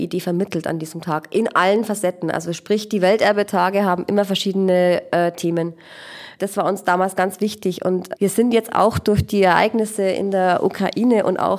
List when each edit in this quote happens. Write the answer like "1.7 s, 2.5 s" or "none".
6.4 s, 8.2 s